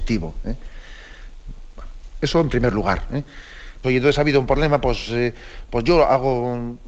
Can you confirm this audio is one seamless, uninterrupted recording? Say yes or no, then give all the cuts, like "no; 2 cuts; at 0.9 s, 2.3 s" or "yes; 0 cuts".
no; 1 cut; at 3.8 s